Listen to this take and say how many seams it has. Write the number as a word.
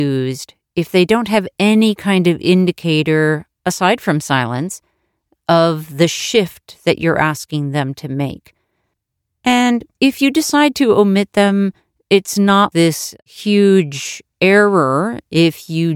one